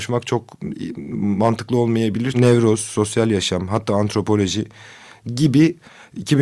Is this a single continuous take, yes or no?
no